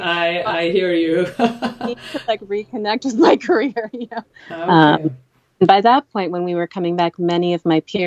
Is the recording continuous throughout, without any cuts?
no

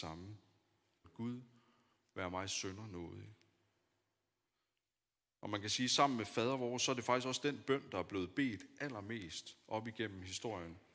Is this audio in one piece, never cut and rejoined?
no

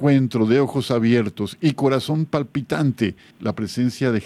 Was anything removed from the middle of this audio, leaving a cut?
yes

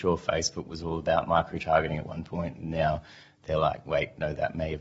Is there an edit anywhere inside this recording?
no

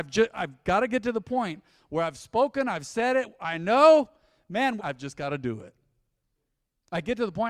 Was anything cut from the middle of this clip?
yes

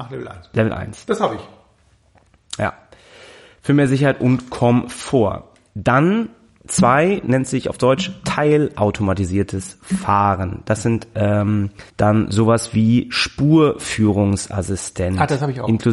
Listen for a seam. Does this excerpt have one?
yes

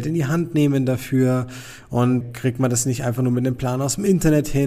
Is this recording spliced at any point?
yes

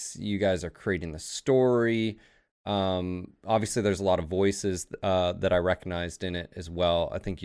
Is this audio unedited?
yes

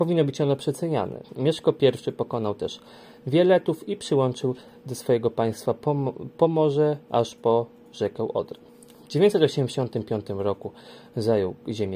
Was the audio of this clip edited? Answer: yes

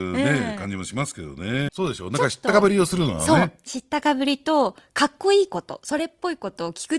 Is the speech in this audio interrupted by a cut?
yes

